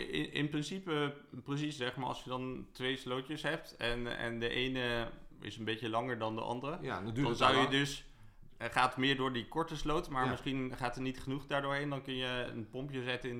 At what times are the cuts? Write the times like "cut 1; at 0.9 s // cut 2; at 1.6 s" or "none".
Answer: none